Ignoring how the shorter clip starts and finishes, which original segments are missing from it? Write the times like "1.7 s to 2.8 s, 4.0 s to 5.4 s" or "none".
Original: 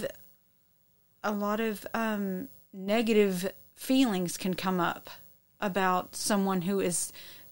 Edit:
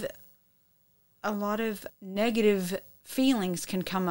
1.9 s to 2.6 s